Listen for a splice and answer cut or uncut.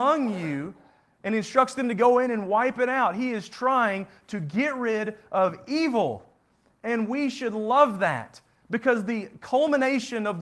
uncut